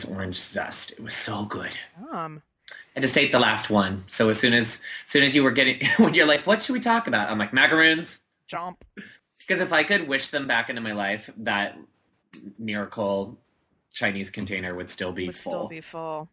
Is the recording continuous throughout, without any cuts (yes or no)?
yes